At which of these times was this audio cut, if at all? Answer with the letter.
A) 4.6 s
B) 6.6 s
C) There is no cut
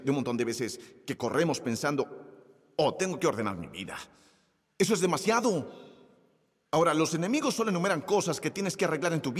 A